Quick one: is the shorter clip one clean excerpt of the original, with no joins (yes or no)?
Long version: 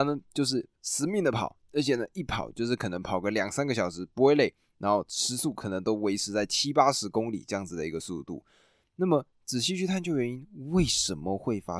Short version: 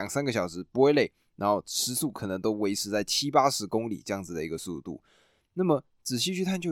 yes